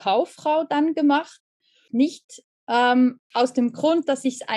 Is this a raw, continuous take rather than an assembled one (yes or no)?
no